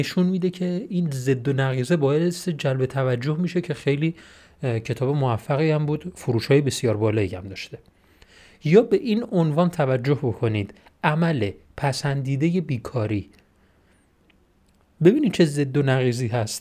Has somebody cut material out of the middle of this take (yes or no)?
no